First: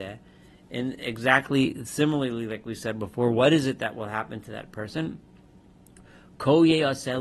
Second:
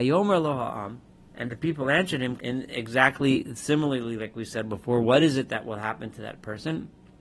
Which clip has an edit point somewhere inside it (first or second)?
second